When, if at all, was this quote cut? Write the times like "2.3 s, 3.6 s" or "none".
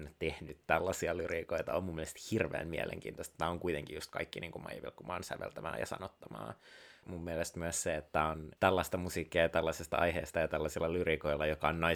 7.0 s, 8.6 s